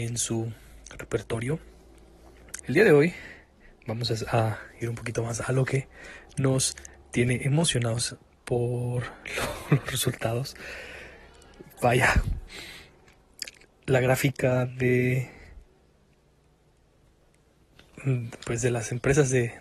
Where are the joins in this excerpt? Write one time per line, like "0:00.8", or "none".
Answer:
0:02.6

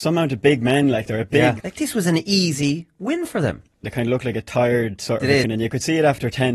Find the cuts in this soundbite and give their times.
0:01.6
0:03.8
0:05.4

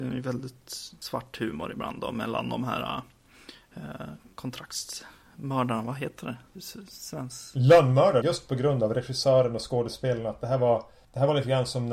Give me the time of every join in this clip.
0:08.2

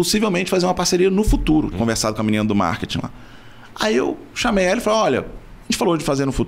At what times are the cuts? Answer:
0:01.7

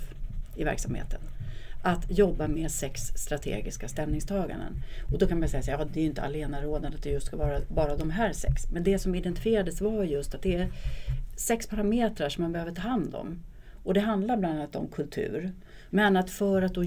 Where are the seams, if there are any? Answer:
0:05.9
0:15.9

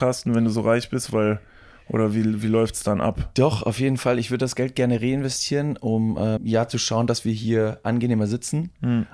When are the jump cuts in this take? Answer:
0:06.4

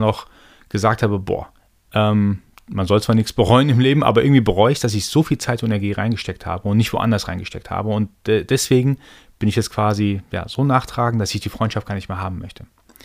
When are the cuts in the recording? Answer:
0:01.8

